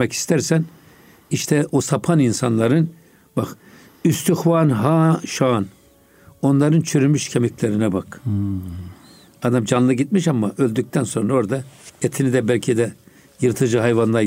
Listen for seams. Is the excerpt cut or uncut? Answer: uncut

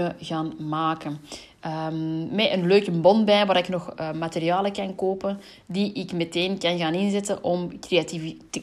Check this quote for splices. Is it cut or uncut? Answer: uncut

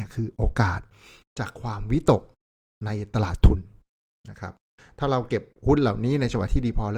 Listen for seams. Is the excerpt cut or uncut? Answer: uncut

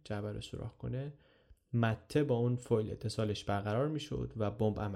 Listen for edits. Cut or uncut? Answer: uncut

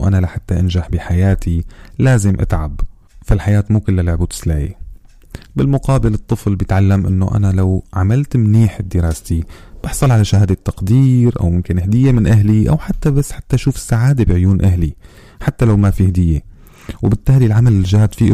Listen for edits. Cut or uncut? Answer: uncut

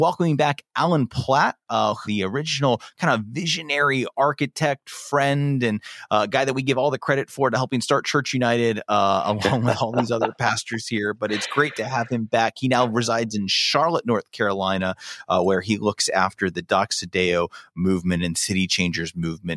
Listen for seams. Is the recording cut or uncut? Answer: cut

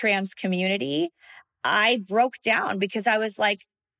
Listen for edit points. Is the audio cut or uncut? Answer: uncut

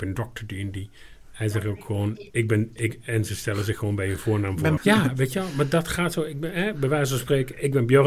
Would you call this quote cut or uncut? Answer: cut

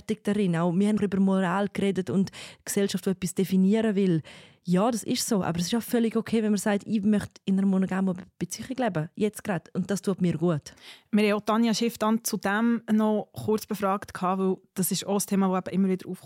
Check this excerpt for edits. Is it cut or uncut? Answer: cut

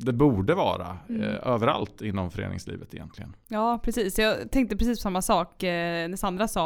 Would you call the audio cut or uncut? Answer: uncut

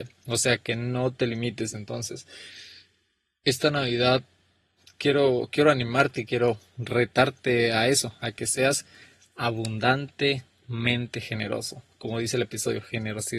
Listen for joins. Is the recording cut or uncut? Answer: cut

